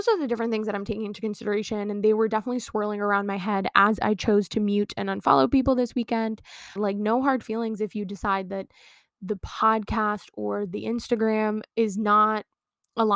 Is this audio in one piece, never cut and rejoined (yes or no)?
no